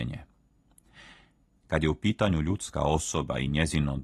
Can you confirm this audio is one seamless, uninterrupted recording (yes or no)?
no